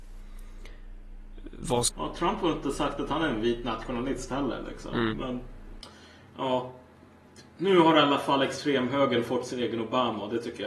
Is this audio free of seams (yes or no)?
no